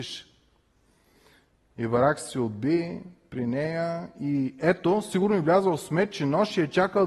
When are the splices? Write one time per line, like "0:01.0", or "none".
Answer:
none